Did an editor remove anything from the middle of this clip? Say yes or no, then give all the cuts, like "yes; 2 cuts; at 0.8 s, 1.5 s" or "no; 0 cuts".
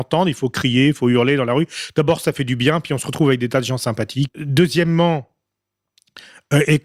yes; 1 cut; at 4.3 s